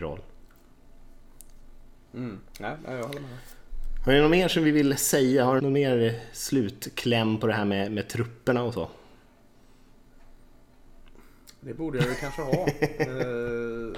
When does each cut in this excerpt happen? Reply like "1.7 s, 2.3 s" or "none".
5.6 s